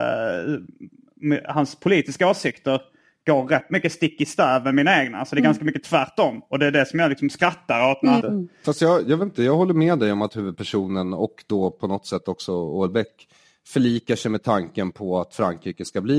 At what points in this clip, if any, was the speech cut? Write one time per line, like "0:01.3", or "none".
0:08.2

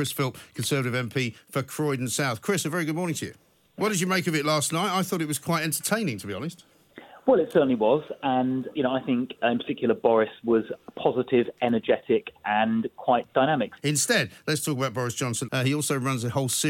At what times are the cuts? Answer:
0:03.8
0:13.8
0:15.5

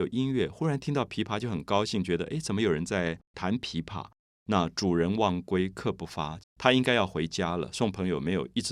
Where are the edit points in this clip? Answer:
0:03.2
0:06.4

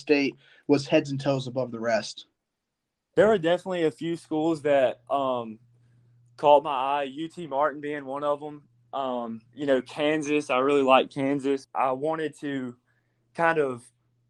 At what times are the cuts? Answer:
0:11.6

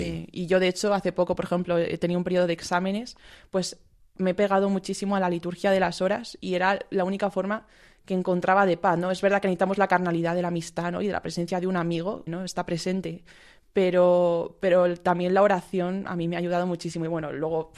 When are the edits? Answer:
0:12.3

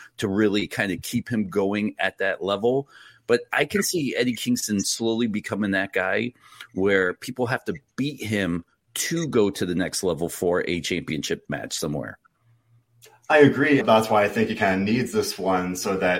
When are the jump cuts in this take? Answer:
0:13.8

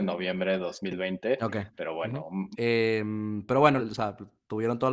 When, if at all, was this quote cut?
0:02.5
0:03.8

